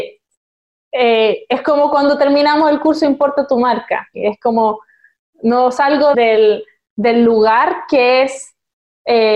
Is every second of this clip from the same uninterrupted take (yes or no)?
no